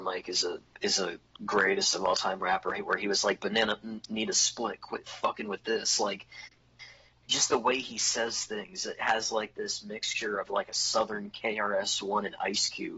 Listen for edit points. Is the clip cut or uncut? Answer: uncut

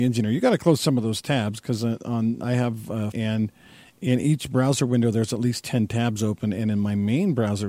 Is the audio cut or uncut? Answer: cut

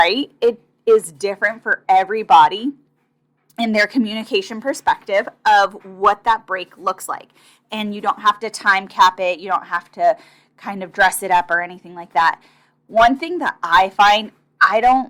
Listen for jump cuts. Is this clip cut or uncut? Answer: uncut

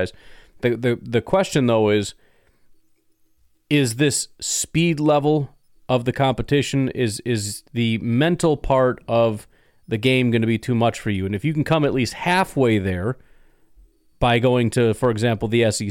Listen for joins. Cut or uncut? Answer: uncut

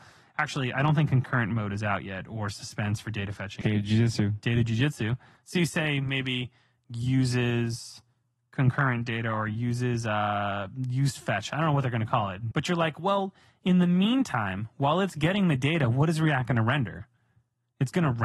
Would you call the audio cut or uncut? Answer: cut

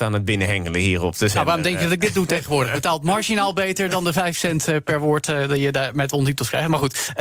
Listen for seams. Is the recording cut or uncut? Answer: uncut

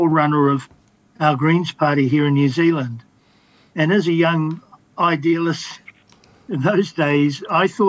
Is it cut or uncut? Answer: uncut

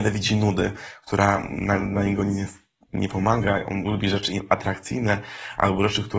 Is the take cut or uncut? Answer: uncut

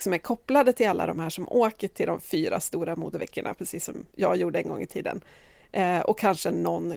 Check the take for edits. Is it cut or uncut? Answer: uncut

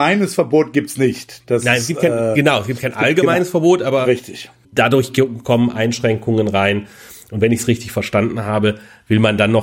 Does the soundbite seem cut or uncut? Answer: cut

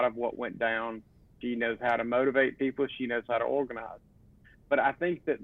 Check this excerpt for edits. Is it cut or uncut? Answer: cut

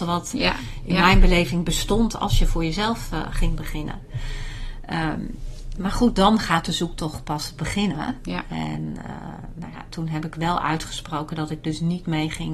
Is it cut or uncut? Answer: uncut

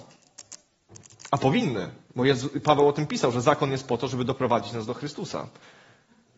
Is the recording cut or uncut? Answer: uncut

